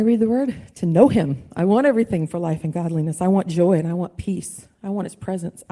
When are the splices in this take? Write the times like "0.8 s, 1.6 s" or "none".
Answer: 1.5 s